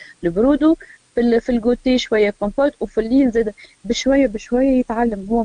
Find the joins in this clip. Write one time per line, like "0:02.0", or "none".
none